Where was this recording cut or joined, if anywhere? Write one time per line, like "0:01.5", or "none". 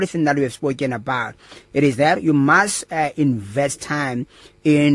none